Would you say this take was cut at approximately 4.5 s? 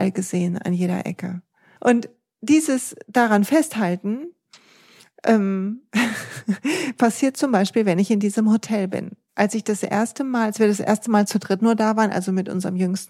no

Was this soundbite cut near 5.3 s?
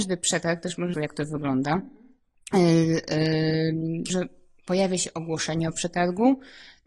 no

